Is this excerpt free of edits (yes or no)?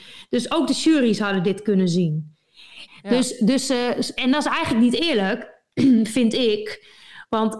no